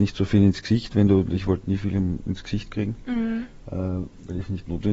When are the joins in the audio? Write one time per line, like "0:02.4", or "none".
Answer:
none